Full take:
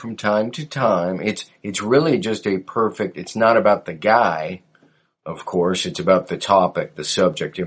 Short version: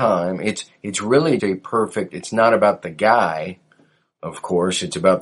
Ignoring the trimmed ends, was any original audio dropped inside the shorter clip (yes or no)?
yes